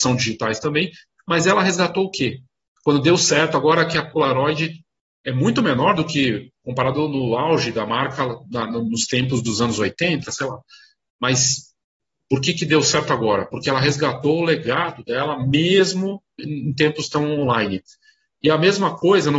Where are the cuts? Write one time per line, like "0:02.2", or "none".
0:10.2